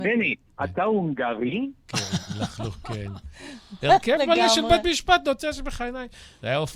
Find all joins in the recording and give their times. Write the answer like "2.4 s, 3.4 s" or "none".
1.8 s, 3.8 s